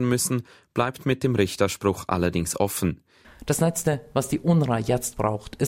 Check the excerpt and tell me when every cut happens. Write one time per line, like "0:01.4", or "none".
0:03.2

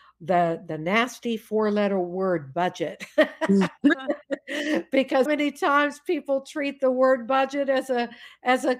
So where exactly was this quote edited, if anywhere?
0:03.9
0:05.3

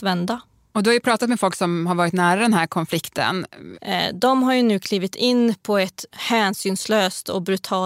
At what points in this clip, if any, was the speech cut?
0:03.7
0:06.1

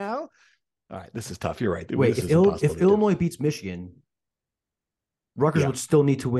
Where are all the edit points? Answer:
none

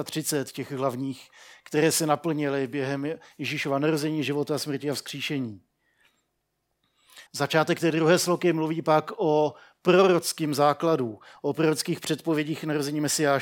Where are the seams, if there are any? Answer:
0:07.3

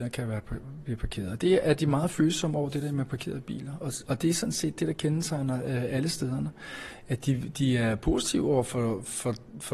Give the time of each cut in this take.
none

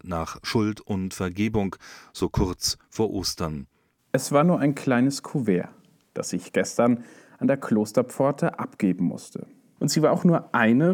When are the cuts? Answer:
0:04.0
0:09.8

